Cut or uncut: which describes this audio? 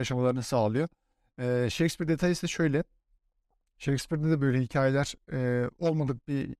uncut